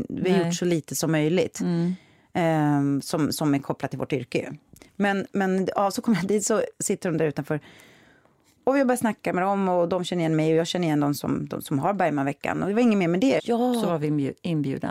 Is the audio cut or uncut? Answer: cut